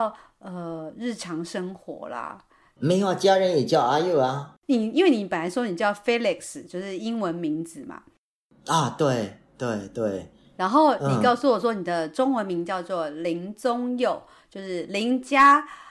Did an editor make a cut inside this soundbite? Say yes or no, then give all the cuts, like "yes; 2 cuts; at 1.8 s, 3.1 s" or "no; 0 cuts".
yes; 1 cut; at 2.8 s